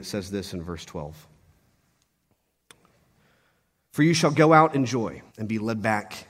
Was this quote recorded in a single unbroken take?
no; 1 cut; at 5.3 s

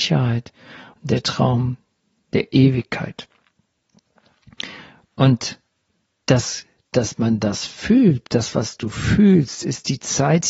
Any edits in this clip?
no; 0 cuts

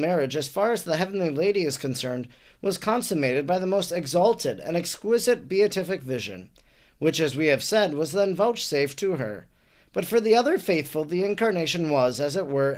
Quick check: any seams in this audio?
no; 0 cuts

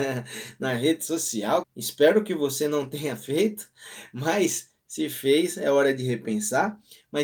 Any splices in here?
yes; 1 cut; at 1.6 s

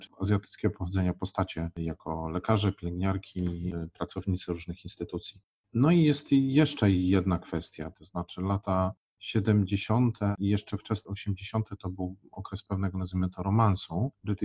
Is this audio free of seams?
no; 1 cut; at 7.9 s

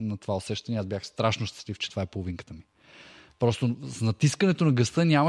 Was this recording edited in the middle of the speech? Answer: no; 0 cuts

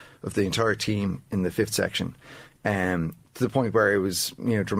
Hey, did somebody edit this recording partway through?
no; 0 cuts

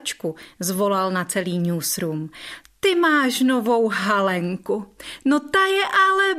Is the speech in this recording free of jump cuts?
yes; 0 cuts

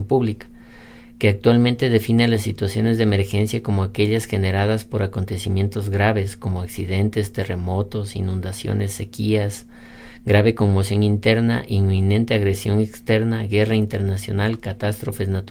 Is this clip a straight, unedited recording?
yes; 0 cuts

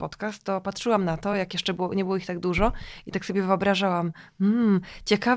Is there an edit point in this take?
no; 0 cuts

